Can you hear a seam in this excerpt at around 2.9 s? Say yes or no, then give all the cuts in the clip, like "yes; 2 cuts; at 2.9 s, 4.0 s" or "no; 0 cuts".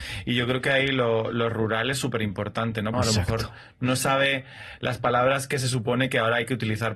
yes; 1 cut; at 2.9 s